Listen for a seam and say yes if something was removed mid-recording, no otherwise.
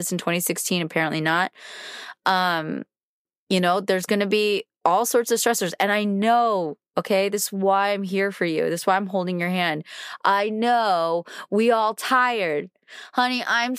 no